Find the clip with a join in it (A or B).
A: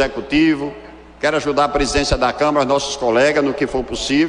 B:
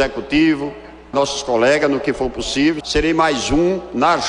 B